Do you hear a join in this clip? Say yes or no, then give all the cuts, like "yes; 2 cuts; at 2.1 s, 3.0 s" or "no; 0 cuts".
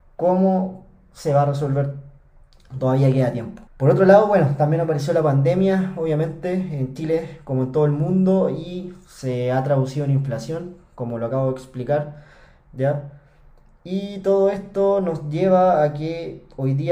yes; 1 cut; at 3.7 s